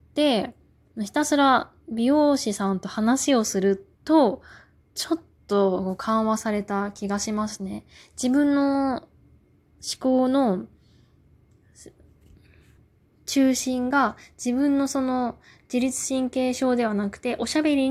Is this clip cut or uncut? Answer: cut